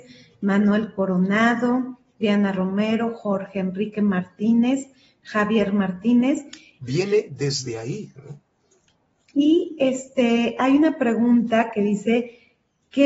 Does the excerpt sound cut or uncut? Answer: cut